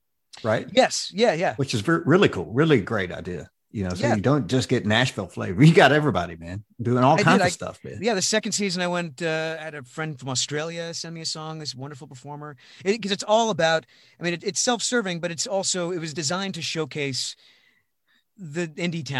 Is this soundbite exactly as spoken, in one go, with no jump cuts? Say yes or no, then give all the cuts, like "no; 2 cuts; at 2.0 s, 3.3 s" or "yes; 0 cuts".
yes; 0 cuts